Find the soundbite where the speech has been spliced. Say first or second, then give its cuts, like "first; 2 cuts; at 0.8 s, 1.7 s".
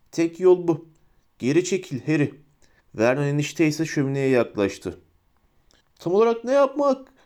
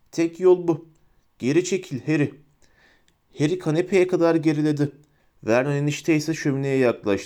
first; 2 cuts; at 2.8 s, 5.8 s